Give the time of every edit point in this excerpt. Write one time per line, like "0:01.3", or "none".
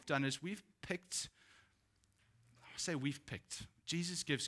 none